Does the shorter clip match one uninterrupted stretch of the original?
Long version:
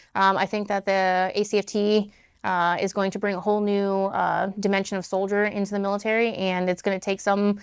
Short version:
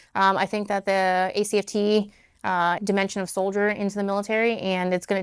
no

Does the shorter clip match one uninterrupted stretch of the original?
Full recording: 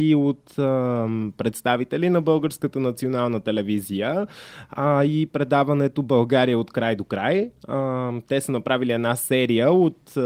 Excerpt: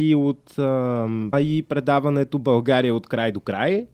no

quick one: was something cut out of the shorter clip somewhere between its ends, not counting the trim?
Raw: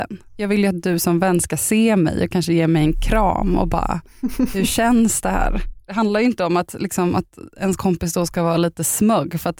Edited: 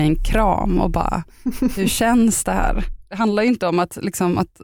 no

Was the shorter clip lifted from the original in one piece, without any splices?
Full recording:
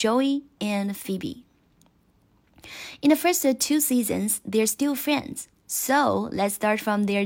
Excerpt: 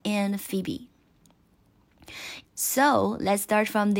no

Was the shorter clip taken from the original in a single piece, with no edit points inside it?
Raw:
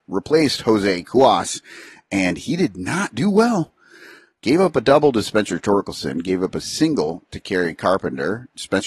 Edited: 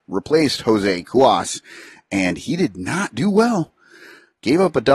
yes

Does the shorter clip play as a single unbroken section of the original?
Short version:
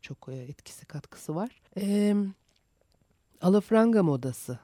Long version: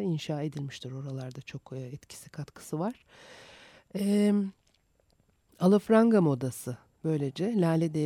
no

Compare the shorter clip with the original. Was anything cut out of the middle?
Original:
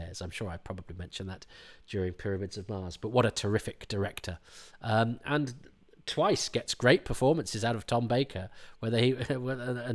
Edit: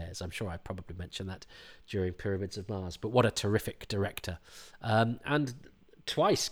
no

